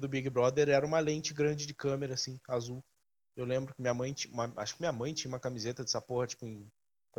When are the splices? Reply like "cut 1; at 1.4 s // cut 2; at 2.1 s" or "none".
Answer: none